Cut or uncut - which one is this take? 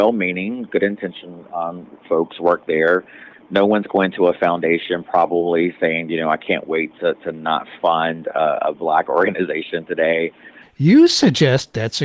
cut